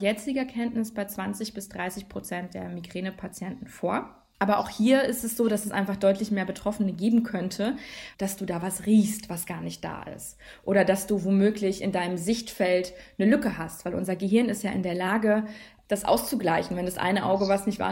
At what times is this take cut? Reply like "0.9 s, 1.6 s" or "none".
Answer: 8.1 s